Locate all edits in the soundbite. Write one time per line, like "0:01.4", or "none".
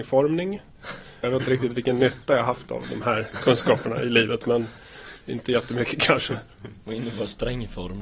0:01.2